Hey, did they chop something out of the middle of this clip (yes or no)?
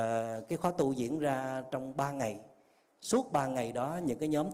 no